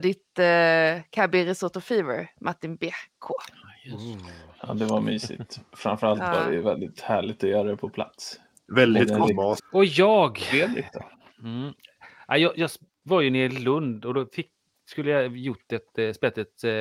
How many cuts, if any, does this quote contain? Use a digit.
1